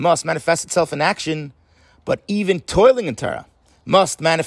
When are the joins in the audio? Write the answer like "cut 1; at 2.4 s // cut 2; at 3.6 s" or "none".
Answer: none

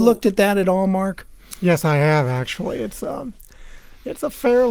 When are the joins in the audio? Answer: none

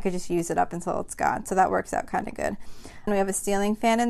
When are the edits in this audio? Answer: cut 1; at 3.1 s

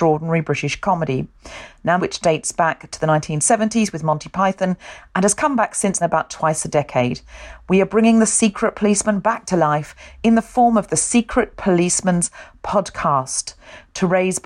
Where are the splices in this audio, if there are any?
cut 1; at 2.0 s // cut 2; at 6.0 s

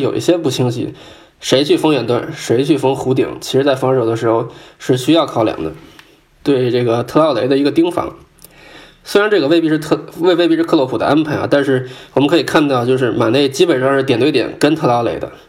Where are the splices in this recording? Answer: cut 1; at 6.4 s

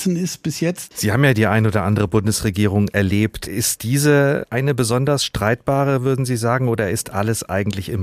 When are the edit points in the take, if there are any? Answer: cut 1; at 0.9 s

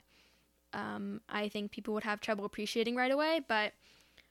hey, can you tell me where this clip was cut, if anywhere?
none

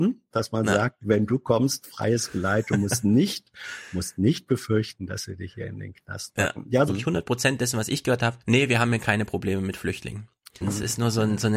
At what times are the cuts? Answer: cut 1; at 6.9 s // cut 2; at 8.4 s // cut 3; at 10.6 s

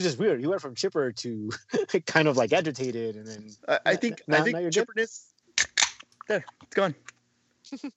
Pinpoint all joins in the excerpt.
cut 1; at 3.6 s // cut 2; at 5.4 s // cut 3; at 6.5 s

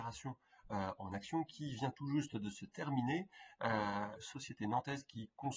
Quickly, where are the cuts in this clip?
cut 1; at 4.2 s

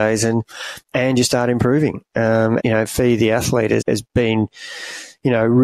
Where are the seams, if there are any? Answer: cut 1; at 2.6 s // cut 2; at 3.8 s

